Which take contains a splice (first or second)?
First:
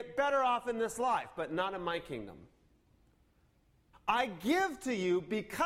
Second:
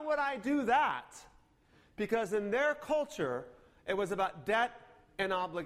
first